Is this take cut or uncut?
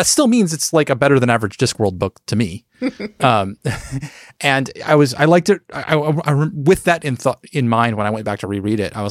uncut